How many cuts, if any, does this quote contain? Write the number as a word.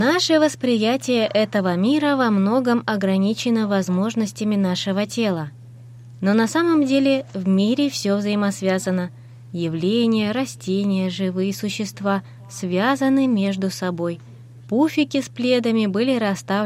two